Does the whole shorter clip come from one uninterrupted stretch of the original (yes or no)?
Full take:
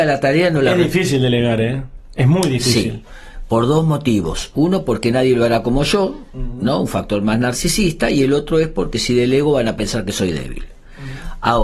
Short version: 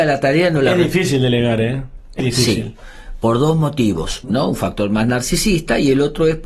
no